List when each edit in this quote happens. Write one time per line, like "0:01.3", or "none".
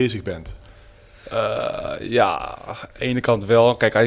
none